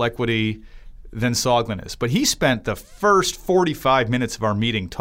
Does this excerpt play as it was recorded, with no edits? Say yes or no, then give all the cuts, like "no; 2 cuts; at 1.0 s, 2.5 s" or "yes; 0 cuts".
yes; 0 cuts